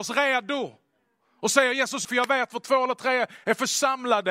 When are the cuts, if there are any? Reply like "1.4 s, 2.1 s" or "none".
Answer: 2.0 s